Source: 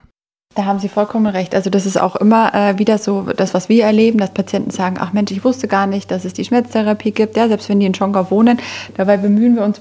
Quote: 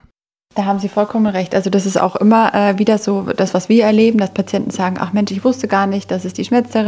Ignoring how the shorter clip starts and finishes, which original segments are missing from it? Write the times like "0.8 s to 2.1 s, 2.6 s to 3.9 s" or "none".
none